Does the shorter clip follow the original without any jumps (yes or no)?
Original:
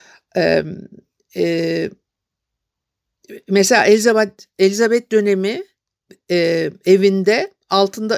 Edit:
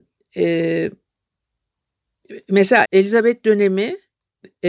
no